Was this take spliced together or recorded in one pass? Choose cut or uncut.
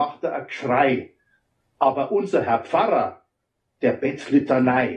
uncut